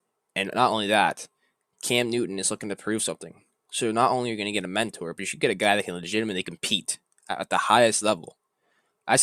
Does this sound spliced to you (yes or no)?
no